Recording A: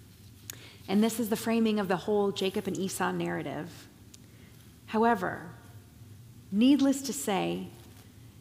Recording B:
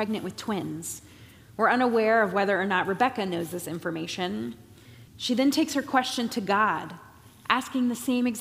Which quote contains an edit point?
B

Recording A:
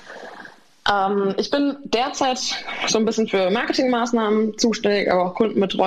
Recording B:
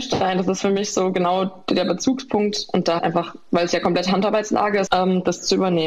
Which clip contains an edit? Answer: B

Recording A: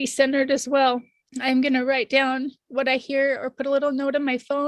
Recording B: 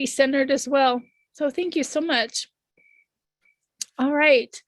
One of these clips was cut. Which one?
A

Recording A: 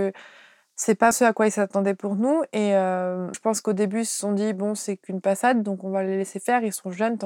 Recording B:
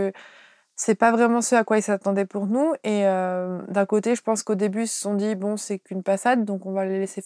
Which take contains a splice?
A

